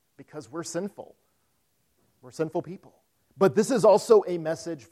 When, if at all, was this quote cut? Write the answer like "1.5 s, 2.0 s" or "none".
3.3 s